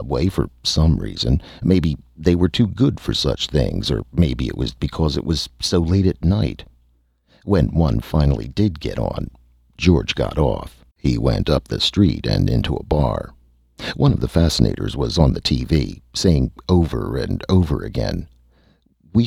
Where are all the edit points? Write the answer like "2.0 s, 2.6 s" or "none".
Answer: 4.8 s, 10.9 s

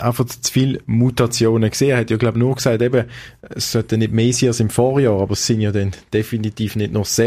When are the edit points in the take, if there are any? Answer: none

